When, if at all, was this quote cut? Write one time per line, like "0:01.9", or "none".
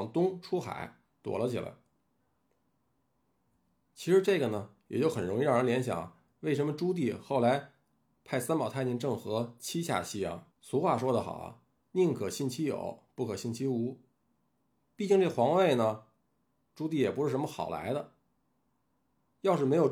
0:10.5